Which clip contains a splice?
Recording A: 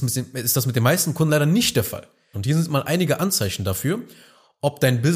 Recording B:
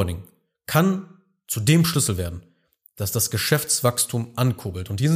A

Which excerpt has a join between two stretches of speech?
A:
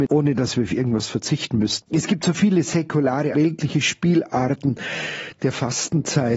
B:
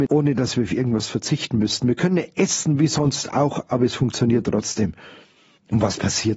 A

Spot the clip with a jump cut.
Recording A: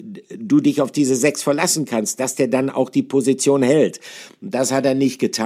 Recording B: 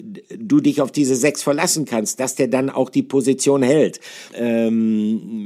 B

